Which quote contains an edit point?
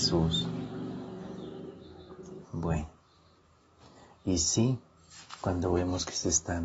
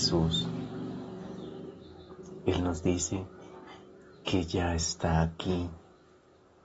first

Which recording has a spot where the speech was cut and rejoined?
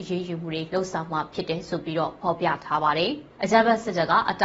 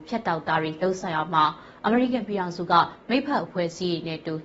first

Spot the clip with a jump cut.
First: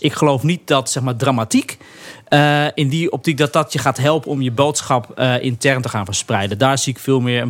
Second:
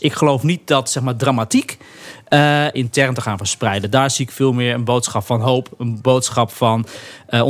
second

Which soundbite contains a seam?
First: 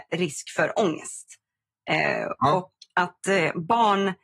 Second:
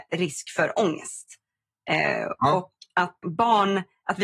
second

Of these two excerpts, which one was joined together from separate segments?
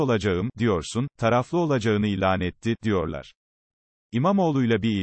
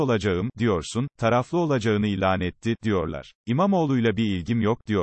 second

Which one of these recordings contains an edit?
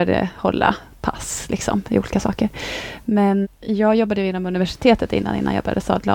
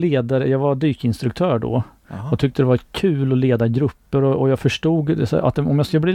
first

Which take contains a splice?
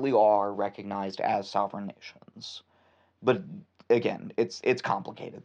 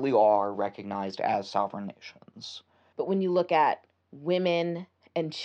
second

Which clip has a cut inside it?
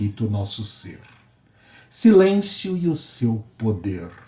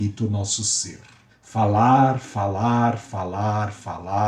second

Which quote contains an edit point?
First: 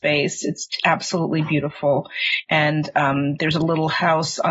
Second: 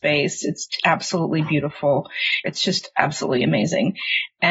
second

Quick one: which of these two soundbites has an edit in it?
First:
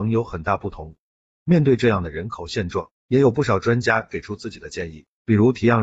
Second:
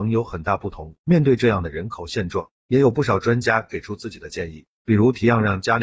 second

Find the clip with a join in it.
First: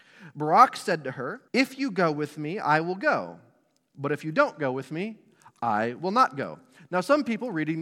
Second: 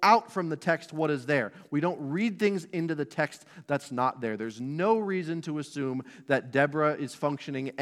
first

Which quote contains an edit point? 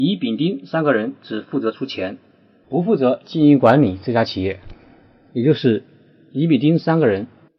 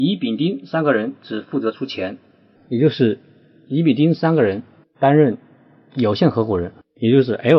second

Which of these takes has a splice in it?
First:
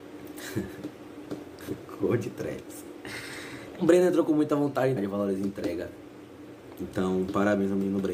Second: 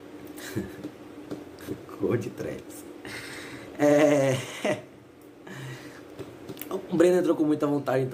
first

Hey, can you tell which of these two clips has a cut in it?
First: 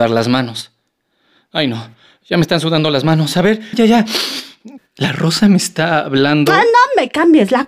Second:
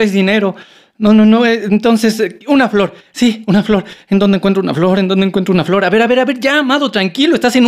first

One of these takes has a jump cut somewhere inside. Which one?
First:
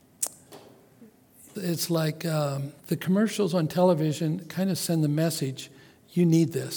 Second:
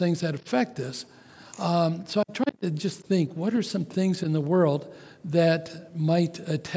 first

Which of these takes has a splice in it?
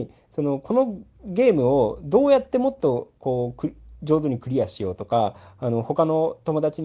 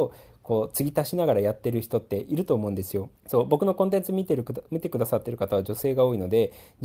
second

